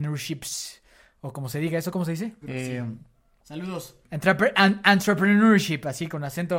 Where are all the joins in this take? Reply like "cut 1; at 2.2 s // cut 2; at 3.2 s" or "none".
cut 1; at 2.4 s // cut 2; at 4.0 s